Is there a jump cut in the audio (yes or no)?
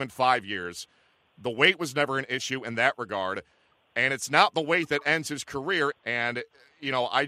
yes